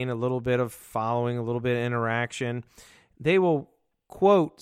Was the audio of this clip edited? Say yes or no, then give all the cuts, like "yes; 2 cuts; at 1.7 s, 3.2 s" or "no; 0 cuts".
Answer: yes; 1 cut; at 3.1 s